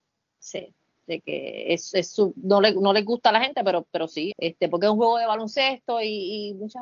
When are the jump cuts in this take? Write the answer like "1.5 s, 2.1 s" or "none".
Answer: 4.3 s